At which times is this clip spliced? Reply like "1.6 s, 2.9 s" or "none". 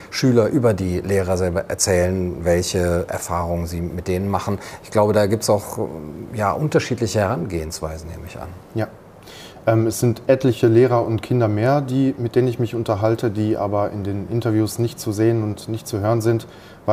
none